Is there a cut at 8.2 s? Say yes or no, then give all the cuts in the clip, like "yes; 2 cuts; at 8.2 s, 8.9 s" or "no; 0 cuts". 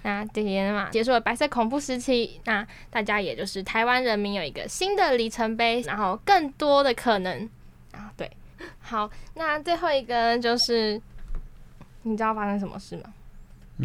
no; 3 cuts; at 0.9 s, 5.8 s, 12.0 s